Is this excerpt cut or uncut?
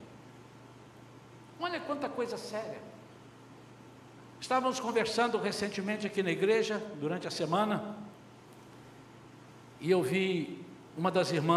uncut